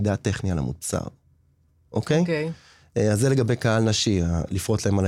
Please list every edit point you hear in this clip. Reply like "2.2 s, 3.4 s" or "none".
none